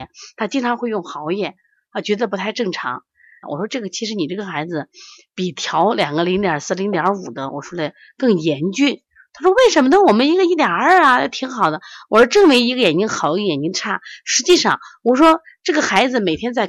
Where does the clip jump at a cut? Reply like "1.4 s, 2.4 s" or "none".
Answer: 3.4 s